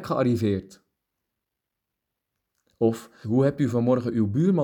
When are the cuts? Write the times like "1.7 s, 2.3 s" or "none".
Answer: 3.2 s